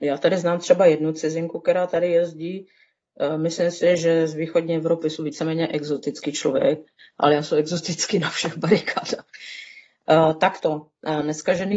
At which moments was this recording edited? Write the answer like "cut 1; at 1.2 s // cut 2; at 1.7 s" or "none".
none